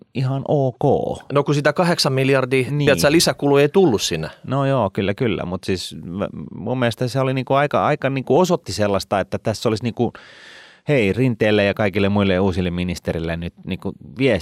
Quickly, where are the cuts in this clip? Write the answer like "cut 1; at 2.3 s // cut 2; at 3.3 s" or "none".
none